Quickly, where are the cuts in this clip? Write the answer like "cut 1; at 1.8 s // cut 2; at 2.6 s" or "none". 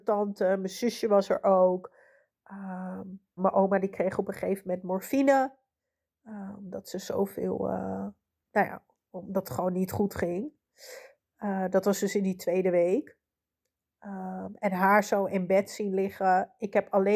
cut 1; at 3.4 s